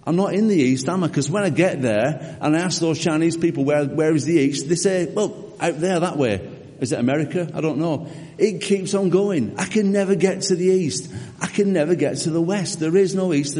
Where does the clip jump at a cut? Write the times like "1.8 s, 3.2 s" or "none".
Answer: none